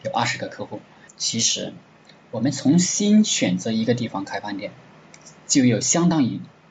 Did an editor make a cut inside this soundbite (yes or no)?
yes